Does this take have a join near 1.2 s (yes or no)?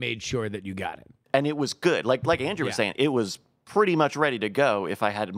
no